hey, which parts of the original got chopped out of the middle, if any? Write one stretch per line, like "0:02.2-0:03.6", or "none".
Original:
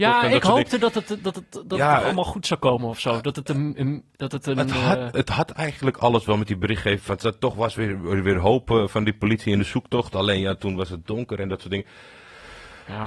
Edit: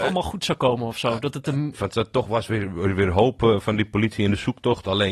0:03.7-0:07.0